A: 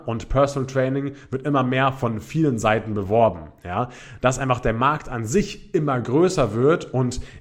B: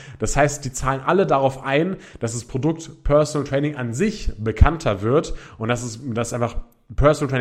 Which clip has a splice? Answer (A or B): A